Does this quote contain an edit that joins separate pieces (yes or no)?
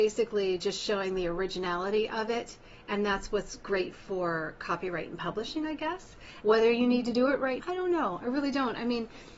yes